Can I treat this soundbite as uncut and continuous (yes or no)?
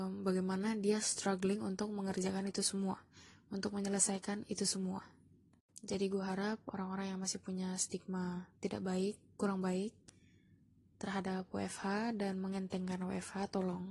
no